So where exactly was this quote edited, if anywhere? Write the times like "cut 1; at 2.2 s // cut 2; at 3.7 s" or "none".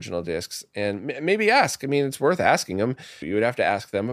cut 1; at 3.2 s